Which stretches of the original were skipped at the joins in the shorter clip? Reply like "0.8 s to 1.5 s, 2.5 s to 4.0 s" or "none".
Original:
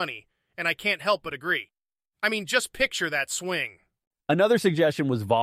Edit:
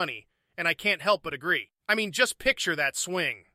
1.8 s to 2.1 s